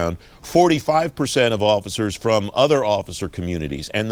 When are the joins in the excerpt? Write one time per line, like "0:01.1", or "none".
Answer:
0:02.5